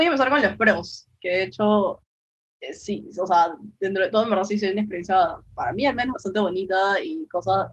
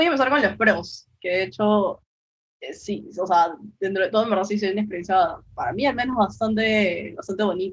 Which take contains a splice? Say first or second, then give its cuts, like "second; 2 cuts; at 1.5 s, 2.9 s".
first; 1 cut; at 6.1 s